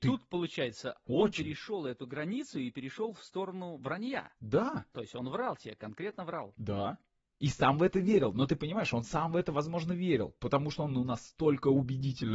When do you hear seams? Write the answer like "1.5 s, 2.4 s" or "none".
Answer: none